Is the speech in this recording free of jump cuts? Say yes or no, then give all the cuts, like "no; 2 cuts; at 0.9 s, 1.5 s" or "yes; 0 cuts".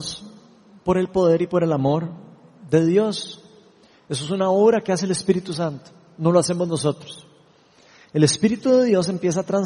yes; 0 cuts